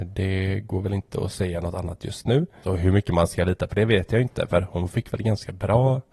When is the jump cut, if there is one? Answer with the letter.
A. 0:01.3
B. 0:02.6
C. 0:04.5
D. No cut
B